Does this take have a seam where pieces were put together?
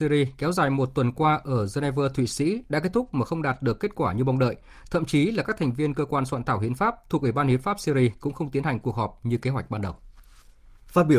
no; 0 cuts

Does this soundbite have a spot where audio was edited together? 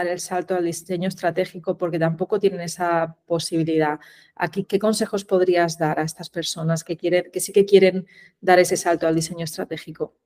yes; 1 cut; at 4.6 s

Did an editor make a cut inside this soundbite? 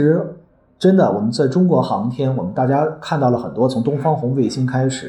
no; 0 cuts

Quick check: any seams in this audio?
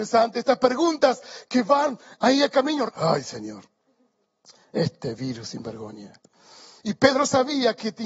yes; 2 cuts; at 2.9 s, 6.8 s

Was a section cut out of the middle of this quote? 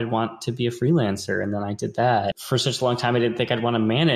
yes; 1 cut; at 2.3 s

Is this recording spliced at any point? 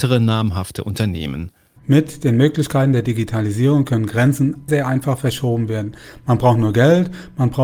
yes; 2 cuts; at 1.8 s, 4.7 s

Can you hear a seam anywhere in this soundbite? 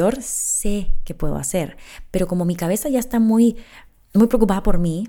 no; 0 cuts

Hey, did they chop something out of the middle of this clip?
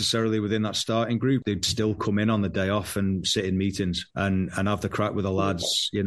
yes; 2 cuts; at 1.4 s, 4.1 s

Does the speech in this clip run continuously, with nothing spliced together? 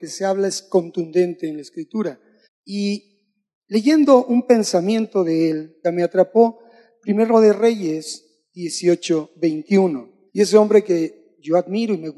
no; 3 cuts; at 2.4 s, 5.8 s, 10.3 s

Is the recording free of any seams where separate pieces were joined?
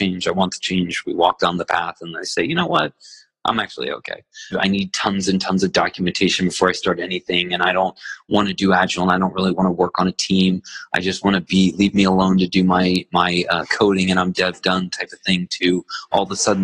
no; 1 cut; at 4.5 s

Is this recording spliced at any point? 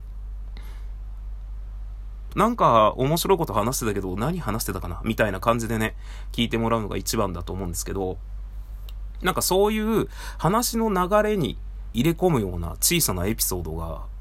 yes; 2 cuts; at 2.3 s, 11.9 s

